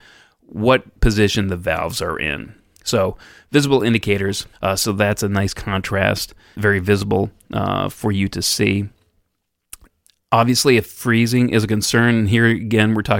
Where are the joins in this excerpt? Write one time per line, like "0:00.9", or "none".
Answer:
0:04.5
0:06.5